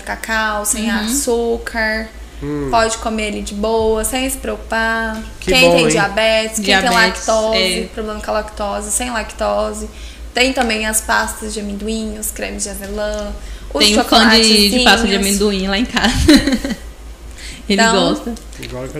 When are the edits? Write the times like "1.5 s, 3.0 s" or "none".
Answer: none